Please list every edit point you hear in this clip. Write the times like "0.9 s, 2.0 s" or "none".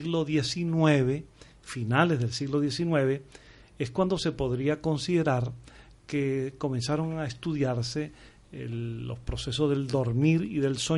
none

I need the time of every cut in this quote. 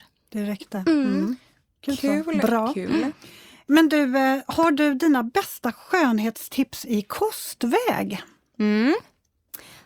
none

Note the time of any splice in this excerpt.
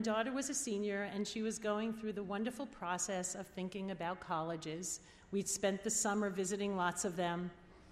none

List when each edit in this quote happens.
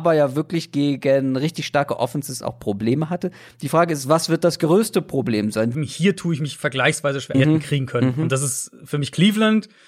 5.7 s, 7.3 s

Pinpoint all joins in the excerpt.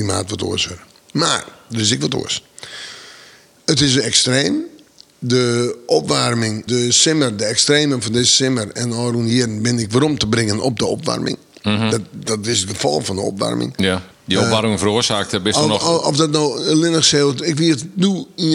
3.6 s, 6.7 s, 14.1 s

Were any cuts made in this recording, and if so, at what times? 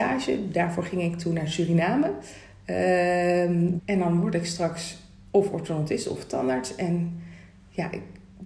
3.8 s

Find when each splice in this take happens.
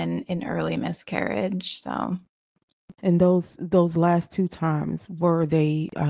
2.9 s

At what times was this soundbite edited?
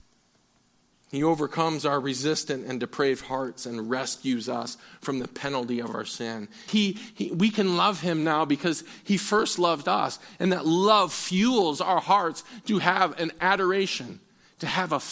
6.7 s

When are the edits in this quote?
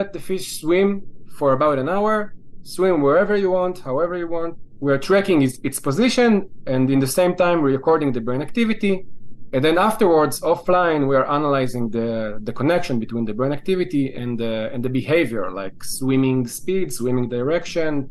none

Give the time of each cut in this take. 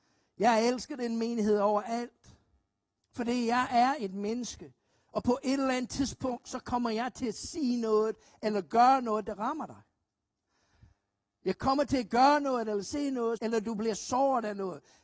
3.0 s, 13.4 s

